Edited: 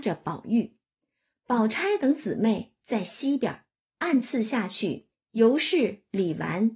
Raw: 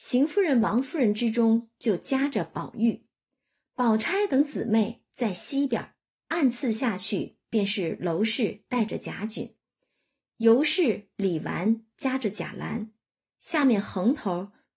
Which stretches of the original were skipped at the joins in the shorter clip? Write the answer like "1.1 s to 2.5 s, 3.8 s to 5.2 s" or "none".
7.4 s to 10.2 s